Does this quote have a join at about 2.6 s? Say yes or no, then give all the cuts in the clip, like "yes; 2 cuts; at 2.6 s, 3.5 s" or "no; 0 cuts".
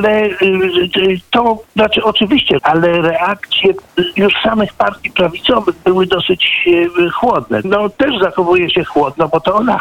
yes; 2 cuts; at 2.6 s, 7.6 s